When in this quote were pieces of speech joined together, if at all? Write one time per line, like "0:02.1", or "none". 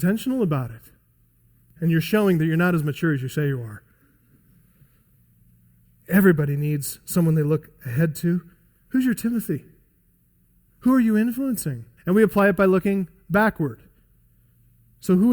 0:01.8
0:12.0